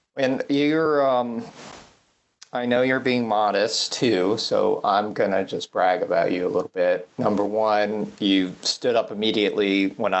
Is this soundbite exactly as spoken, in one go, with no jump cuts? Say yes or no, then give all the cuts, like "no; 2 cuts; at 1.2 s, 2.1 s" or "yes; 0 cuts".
yes; 0 cuts